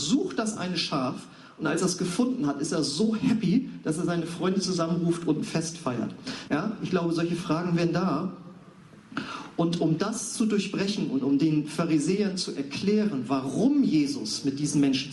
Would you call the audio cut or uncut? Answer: cut